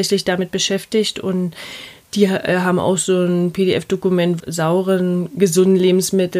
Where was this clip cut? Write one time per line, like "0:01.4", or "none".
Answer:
0:04.4